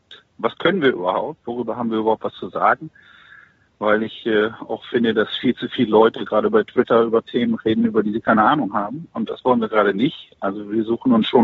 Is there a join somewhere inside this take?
no; 0 cuts

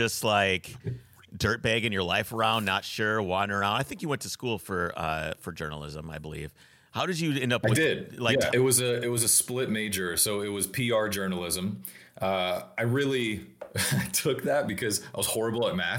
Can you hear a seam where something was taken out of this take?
yes; 1 cut; at 8.5 s

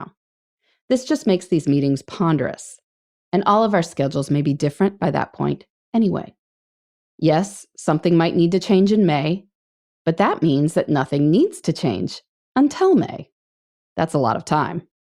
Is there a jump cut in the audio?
yes; 1 cut; at 7.0 s

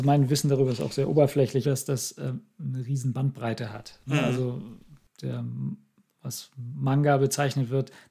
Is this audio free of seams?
no; 1 cut; at 1.6 s

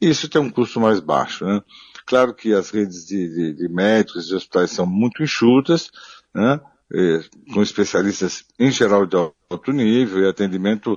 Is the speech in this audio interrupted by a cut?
no; 0 cuts

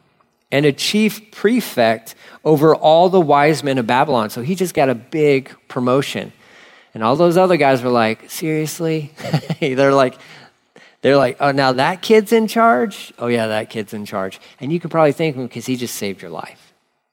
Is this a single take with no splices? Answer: yes; 0 cuts

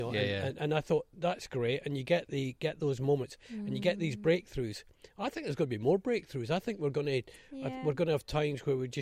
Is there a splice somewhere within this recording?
no; 0 cuts

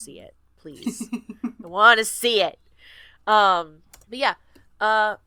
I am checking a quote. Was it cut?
yes; 1 cut; at 4.0 s

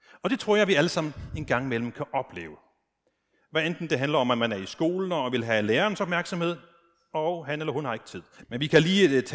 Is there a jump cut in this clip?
yes; 1 cut; at 8.4 s

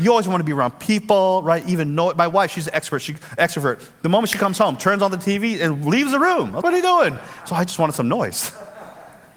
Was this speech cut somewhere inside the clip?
yes; 1 cut; at 6.6 s

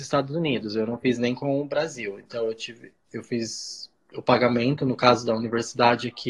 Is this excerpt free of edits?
yes; 0 cuts

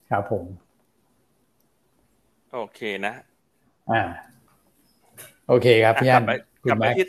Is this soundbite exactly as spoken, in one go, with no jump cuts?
yes; 0 cuts

